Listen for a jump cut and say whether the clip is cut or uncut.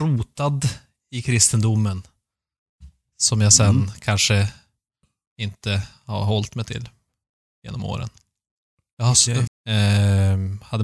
cut